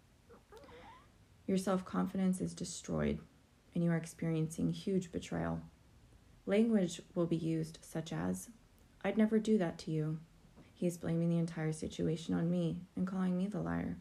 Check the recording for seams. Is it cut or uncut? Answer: cut